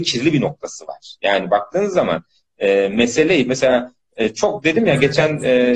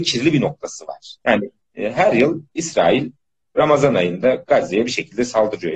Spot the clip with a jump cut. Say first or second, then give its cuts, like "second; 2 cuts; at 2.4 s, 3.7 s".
second; 1 cut; at 1.2 s